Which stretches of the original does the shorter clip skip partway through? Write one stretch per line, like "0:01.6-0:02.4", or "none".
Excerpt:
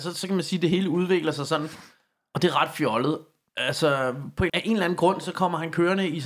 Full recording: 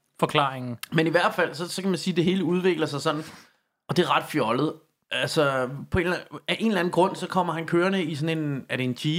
0:06.0-0:06.4